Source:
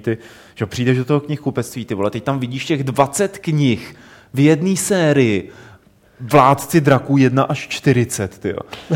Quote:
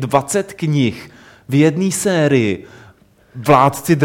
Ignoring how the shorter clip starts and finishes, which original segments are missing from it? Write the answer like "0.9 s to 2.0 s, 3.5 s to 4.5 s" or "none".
none